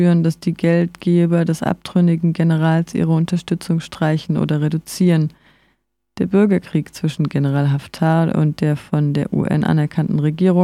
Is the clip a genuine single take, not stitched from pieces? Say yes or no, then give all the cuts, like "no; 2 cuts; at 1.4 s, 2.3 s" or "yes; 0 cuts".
yes; 0 cuts